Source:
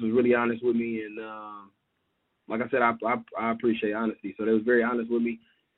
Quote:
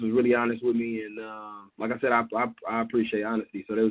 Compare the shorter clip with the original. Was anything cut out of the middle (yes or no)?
yes